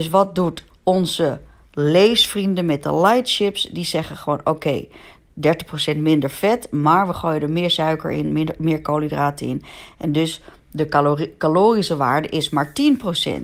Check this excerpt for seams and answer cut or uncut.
uncut